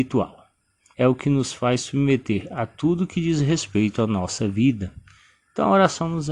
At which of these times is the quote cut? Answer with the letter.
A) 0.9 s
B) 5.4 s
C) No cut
A